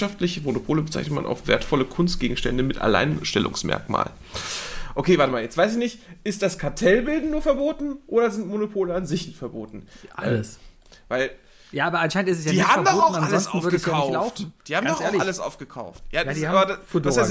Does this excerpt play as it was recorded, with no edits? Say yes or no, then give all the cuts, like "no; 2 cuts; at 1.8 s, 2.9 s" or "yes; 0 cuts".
yes; 0 cuts